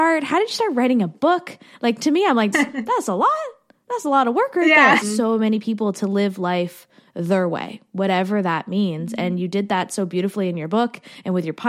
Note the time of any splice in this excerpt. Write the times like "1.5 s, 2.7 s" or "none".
2.5 s, 5.0 s